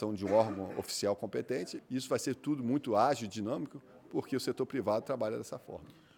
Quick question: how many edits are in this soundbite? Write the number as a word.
one